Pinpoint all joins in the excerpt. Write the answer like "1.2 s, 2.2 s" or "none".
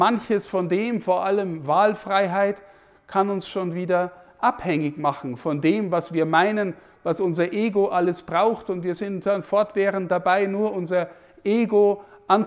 none

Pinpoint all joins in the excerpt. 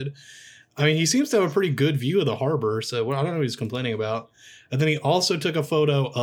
none

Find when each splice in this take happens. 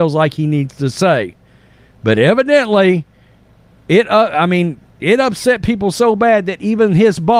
none

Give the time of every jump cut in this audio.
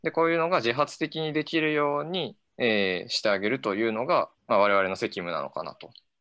2.5 s, 4.4 s

